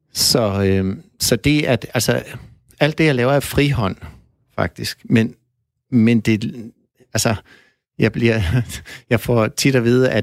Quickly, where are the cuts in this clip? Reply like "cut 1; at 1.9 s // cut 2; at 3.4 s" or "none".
none